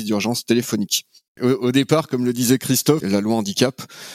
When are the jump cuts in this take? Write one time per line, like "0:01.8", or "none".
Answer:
0:01.3
0:03.0